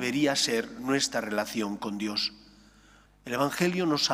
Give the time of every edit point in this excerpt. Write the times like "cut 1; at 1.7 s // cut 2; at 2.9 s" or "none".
cut 1; at 3.1 s